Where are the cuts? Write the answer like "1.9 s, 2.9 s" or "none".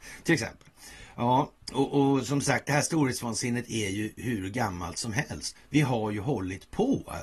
1.6 s, 5.6 s